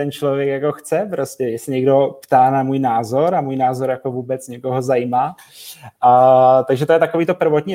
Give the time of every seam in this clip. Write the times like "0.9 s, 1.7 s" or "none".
none